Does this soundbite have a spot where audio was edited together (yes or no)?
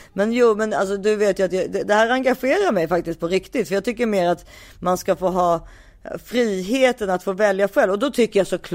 no